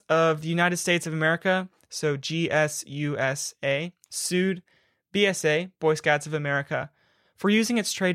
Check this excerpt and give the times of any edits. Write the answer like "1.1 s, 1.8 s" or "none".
none